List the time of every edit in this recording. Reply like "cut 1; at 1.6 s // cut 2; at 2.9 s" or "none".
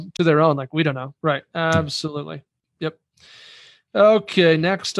cut 1; at 1.2 s